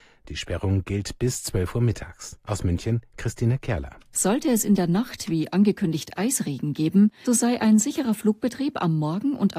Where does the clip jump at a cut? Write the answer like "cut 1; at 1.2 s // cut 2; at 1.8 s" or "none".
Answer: cut 1; at 7.3 s